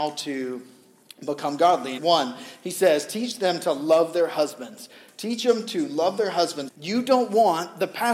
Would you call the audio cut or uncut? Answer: cut